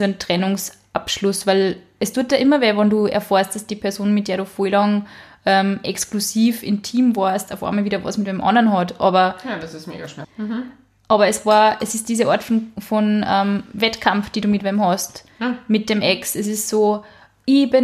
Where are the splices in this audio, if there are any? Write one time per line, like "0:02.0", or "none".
0:10.2